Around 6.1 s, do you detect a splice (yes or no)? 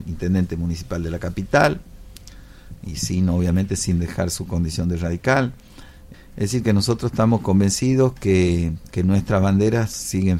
yes